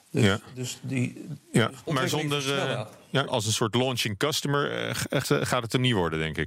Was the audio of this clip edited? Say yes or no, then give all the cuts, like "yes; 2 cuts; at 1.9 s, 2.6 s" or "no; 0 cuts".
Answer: yes; 3 cuts; at 1.9 s, 3.3 s, 5.2 s